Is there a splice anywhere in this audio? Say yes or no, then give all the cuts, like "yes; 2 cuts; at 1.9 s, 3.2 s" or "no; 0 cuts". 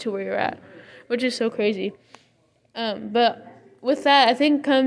no; 0 cuts